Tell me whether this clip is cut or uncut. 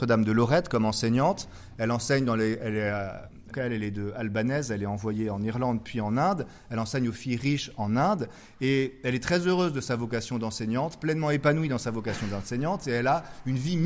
cut